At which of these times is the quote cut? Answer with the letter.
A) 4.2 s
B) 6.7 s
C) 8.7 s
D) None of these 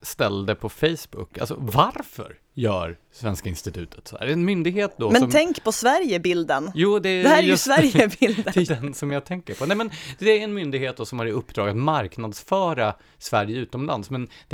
C